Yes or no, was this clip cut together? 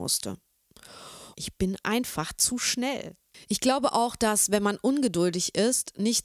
yes